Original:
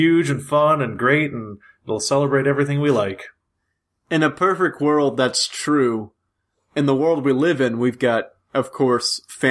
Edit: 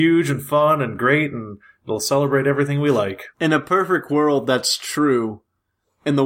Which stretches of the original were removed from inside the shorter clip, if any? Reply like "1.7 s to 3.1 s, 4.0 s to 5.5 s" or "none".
3.3 s to 4.0 s